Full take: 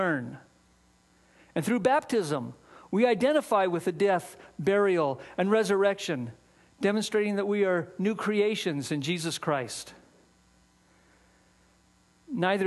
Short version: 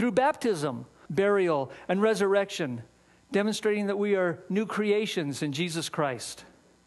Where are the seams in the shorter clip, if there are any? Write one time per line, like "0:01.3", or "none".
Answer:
0:01.1